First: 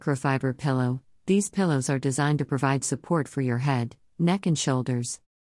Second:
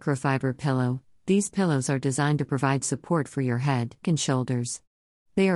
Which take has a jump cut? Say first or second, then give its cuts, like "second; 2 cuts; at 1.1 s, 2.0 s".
second; 1 cut; at 4.0 s